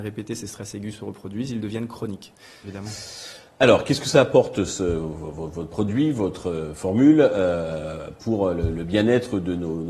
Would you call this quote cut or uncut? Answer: cut